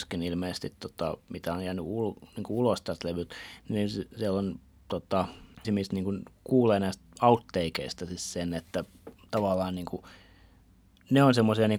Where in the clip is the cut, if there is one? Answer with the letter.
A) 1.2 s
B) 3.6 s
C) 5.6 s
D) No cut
C